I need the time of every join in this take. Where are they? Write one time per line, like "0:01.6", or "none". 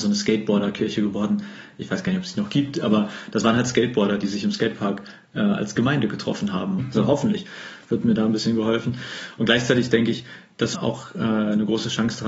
0:06.8
0:10.7